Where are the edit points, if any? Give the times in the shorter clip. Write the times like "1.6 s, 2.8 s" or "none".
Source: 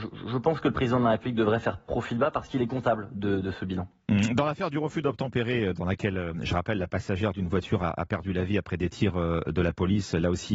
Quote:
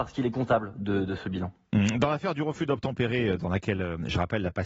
none